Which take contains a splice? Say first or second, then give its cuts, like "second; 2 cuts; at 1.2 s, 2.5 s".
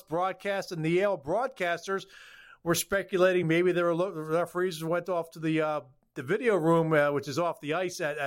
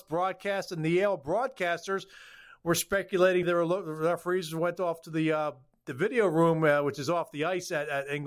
second; 1 cut; at 3.4 s